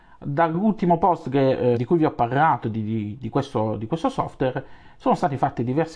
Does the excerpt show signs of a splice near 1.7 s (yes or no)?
yes